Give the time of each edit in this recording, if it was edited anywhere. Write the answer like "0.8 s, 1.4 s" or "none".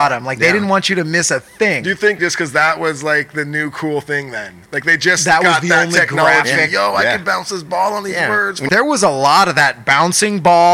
2.2 s, 8.7 s

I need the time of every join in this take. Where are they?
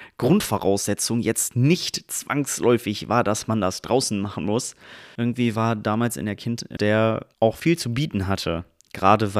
5.2 s, 6.8 s

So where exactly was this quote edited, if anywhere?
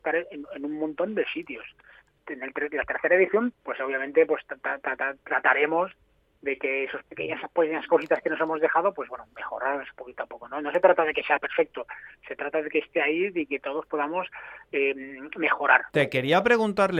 none

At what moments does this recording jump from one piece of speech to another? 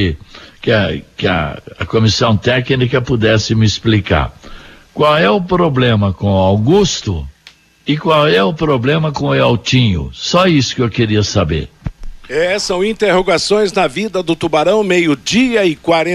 none

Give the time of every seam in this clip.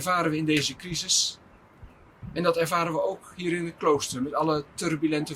none

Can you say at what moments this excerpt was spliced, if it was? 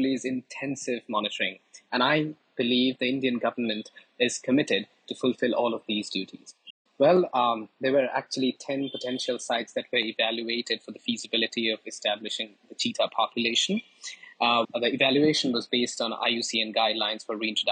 6.9 s, 14.6 s

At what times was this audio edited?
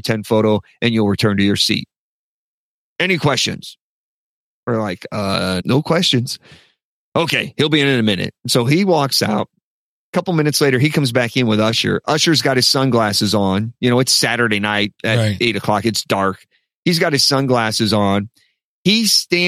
5.6 s

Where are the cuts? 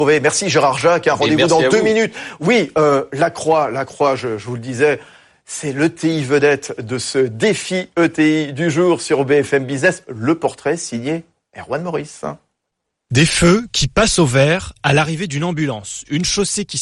none

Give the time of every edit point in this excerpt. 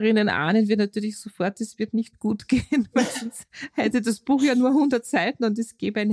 none

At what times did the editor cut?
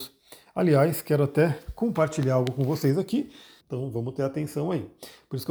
3.6 s

